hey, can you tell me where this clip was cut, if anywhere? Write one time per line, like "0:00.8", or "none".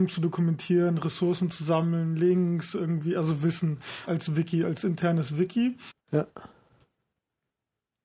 0:04.1
0:05.9